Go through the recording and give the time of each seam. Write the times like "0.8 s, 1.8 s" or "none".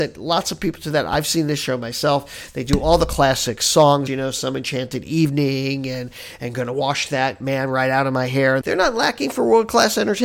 4.1 s, 8.6 s